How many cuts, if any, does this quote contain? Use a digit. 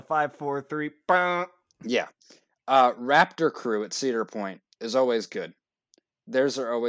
0